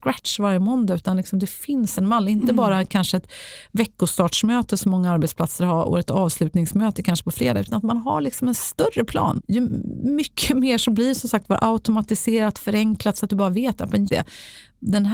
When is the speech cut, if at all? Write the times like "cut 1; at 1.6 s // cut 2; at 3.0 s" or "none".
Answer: cut 1; at 9.4 s // cut 2; at 14.1 s